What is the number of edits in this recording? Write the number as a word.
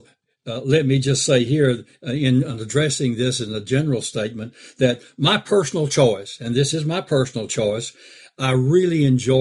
zero